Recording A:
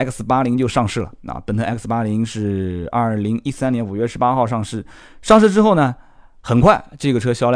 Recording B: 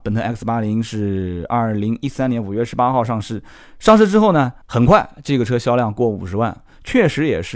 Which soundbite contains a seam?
B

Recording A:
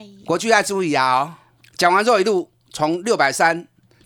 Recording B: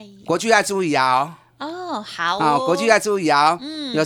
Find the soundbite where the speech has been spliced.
A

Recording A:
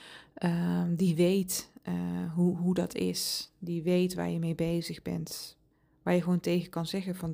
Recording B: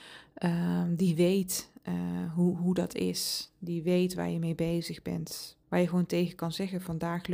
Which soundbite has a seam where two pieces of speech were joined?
B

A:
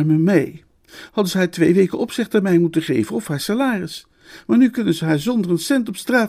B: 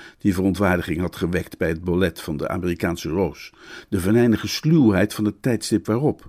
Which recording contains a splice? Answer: A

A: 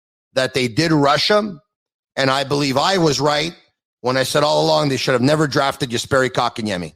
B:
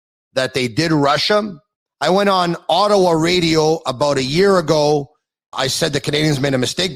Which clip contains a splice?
B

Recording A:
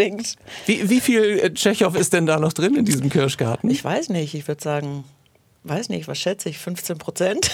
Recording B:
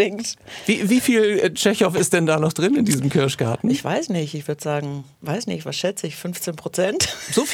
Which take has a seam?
B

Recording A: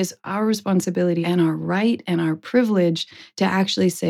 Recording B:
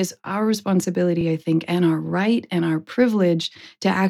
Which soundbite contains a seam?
A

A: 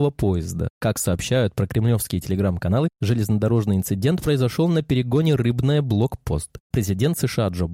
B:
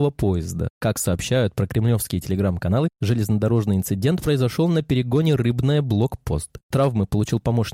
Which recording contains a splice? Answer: A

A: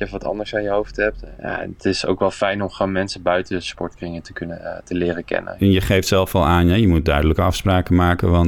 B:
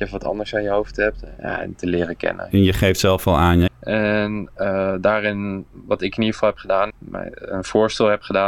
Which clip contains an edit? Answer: B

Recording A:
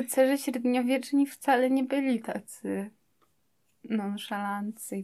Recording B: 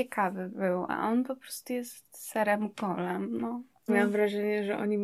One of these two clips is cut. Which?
B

